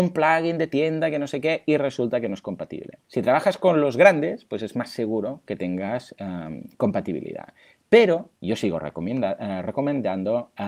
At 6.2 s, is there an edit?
no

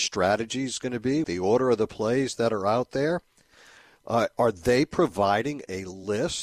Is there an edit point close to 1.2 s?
yes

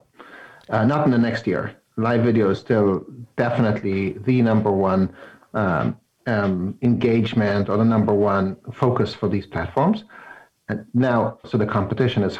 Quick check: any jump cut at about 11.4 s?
yes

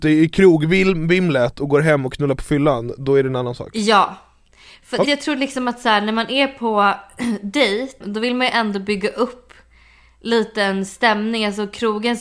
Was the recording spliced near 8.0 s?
yes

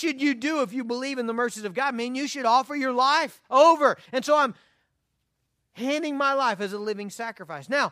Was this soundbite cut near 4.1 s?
yes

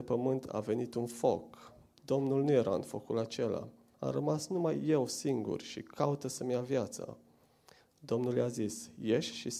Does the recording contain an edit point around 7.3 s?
no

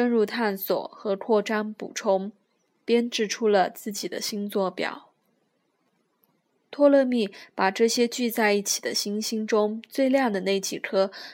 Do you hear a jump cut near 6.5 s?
yes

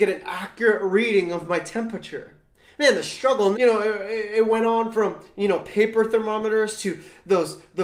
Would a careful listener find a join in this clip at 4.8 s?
no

